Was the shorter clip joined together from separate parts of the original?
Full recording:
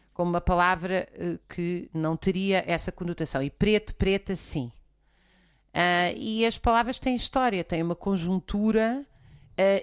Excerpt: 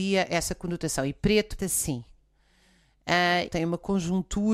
yes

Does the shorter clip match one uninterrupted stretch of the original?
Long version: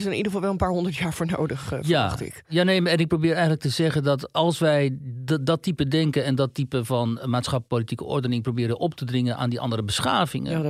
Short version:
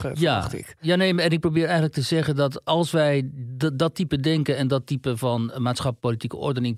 yes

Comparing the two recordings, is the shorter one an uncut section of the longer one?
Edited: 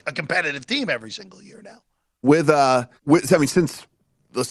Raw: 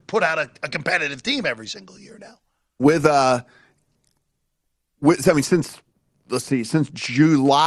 no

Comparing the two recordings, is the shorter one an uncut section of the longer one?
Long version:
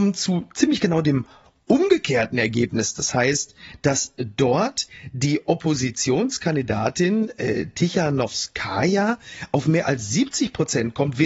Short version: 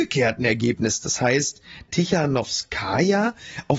no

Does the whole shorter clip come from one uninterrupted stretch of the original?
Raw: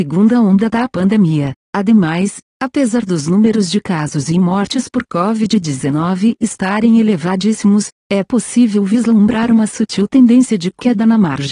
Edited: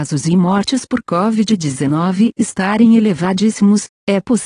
yes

